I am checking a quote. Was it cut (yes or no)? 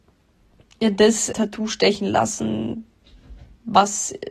yes